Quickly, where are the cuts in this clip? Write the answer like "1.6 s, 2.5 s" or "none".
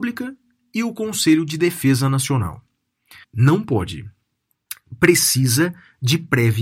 3.2 s